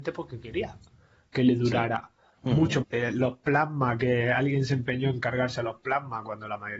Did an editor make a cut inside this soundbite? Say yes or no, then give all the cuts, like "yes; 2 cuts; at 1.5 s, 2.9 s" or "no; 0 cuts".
yes; 1 cut; at 2.8 s